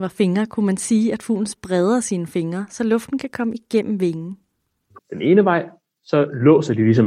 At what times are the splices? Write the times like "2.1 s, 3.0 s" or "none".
5.0 s